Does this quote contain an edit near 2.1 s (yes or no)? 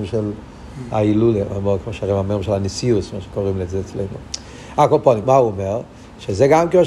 no